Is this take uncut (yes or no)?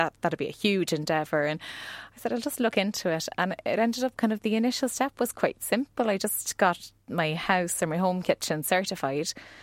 yes